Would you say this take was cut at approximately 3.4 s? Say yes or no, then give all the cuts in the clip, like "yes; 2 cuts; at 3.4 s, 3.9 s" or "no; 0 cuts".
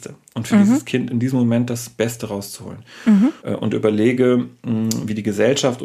yes; 1 cut; at 3.4 s